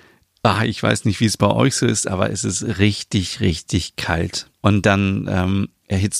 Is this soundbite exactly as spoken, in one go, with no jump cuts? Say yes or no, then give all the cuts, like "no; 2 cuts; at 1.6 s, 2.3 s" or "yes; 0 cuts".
no; 1 cut; at 4.6 s